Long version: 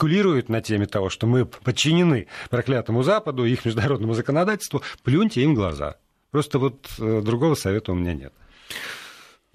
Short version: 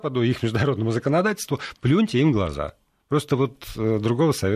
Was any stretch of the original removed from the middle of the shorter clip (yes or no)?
no